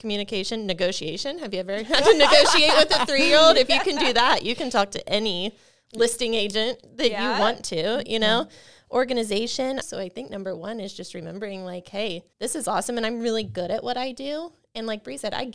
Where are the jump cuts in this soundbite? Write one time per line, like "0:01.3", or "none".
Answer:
0:09.8
0:12.3